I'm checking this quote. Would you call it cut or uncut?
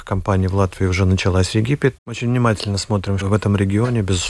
cut